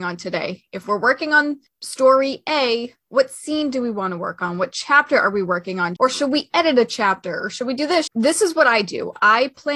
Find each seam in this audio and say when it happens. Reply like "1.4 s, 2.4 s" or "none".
6.0 s, 8.1 s